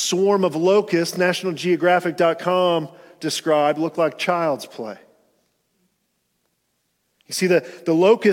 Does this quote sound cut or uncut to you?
uncut